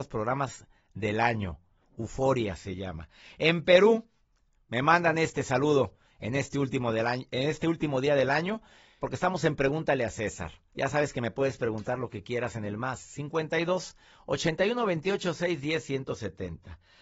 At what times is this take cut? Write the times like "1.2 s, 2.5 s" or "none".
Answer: 9.0 s, 10.7 s